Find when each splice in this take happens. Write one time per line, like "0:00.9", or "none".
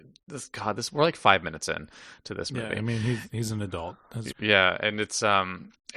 0:04.3